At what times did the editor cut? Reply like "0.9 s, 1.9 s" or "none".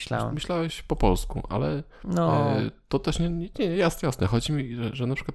none

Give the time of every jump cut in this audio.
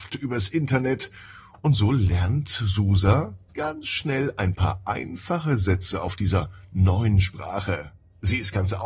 3.5 s

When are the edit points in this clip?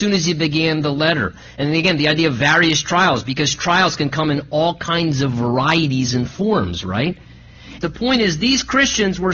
7.8 s

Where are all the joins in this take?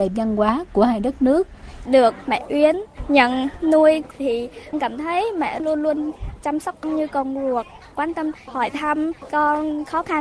1.9 s

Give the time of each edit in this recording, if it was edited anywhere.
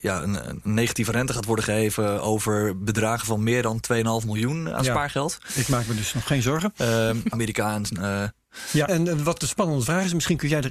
7.3 s, 8.9 s

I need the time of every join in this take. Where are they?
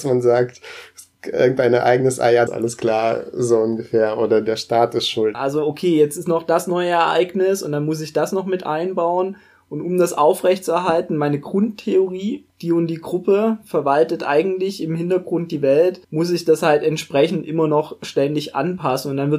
2.5 s, 5.3 s, 16.0 s

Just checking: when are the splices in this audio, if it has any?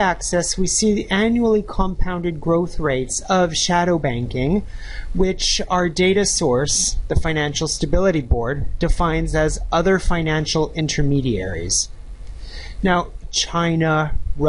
13.2 s

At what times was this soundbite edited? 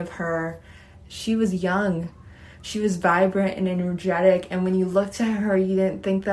1.0 s

